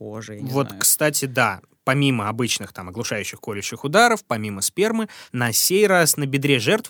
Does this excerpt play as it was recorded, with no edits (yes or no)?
yes